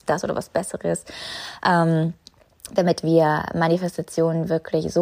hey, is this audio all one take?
yes; 0 cuts

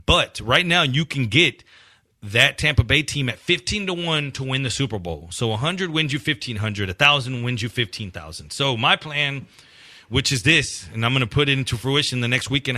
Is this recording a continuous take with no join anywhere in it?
yes; 0 cuts

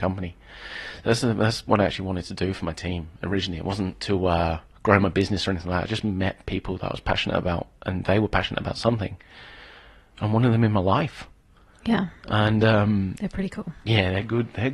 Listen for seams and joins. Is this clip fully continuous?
yes; 0 cuts

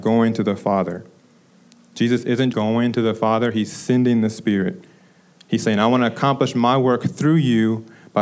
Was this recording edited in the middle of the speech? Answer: yes; 1 cut; at 2.5 s

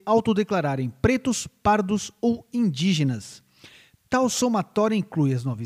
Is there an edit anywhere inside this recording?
no; 0 cuts

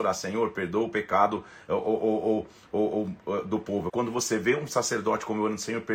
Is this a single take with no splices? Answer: no; 1 cut; at 3.9 s

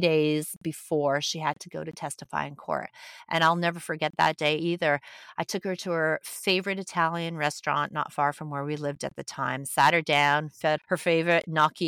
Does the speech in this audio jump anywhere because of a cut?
yes; 1 cut; at 10.8 s

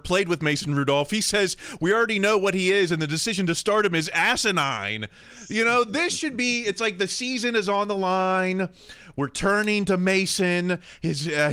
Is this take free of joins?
yes; 0 cuts

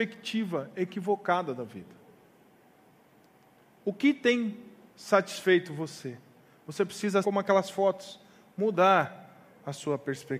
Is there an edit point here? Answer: yes; 1 cut; at 7.2 s

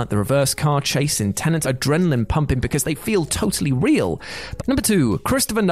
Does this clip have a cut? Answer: yes; 2 cuts; at 1.6 s, 4.6 s

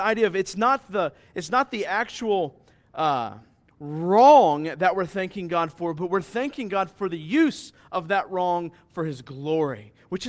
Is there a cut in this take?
no; 0 cuts

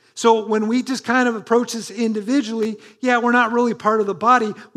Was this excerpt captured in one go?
yes; 0 cuts

